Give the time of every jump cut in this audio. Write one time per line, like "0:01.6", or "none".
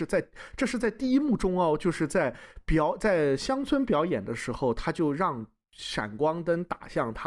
none

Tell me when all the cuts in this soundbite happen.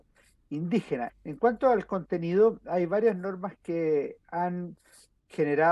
0:01.1

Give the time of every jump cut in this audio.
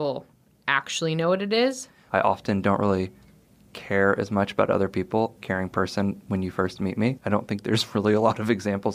0:02.1
0:05.4
0:07.2

